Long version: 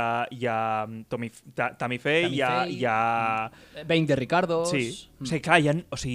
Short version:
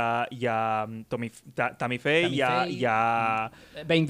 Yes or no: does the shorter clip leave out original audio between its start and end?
no